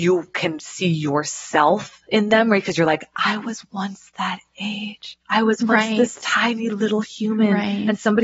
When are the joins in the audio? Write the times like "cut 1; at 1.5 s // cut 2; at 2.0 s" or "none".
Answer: cut 1; at 5.2 s